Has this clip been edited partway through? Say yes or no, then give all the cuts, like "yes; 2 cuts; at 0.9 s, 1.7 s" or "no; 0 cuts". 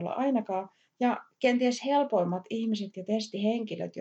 no; 0 cuts